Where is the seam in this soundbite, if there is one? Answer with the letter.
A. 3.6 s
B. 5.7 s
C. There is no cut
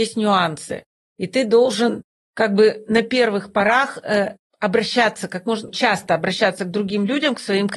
B